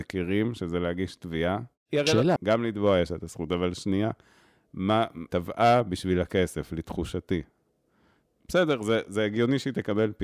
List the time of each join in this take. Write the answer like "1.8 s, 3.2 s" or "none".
2.4 s, 5.3 s